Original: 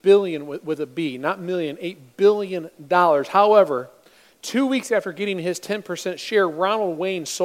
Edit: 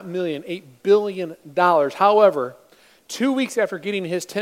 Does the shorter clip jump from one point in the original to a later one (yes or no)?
no